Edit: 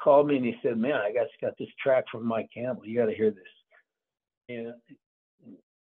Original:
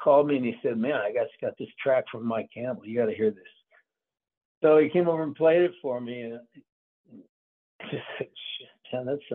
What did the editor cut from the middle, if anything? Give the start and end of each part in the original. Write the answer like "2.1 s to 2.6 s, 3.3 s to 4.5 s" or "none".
4.5 s to 6.1 s